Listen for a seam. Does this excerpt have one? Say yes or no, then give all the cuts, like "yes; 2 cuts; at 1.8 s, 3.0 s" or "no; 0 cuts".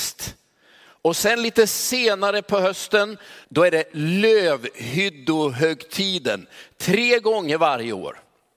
yes; 1 cut; at 3.4 s